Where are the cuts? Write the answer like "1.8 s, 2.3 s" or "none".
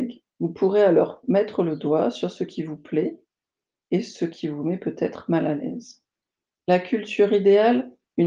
none